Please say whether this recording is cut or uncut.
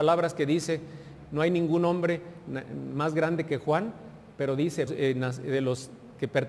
cut